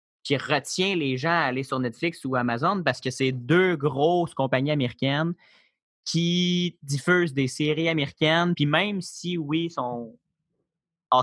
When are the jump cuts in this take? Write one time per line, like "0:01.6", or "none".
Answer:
none